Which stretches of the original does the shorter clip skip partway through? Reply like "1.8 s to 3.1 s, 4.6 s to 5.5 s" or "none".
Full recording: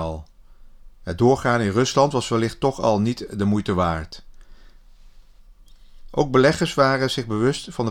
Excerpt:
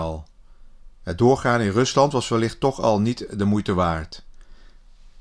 none

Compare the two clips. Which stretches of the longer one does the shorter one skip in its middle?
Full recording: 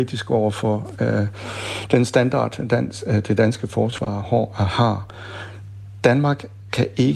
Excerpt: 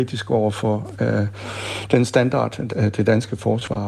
2.7 s to 3.0 s

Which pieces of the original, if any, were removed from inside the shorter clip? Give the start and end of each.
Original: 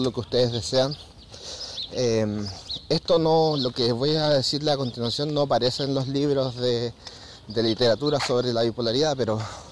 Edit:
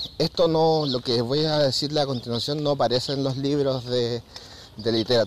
none

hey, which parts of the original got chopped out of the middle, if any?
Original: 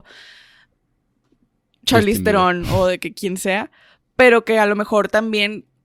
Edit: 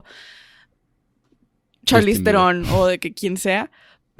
none

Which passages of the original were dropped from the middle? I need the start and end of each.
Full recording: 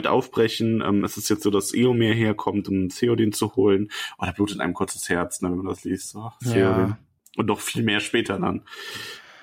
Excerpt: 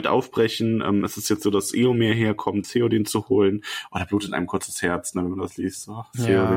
2.6 s to 2.9 s

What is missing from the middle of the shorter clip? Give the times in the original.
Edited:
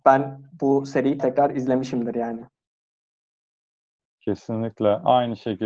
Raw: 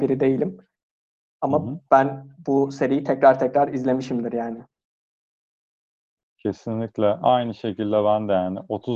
3.0 s to 3.4 s

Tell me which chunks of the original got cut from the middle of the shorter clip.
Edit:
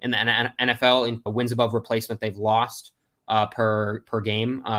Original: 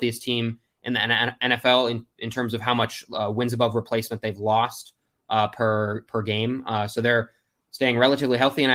2.1 s to 3.3 s

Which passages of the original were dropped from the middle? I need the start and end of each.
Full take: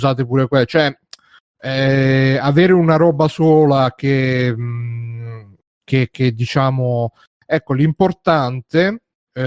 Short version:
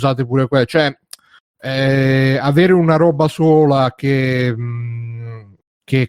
none

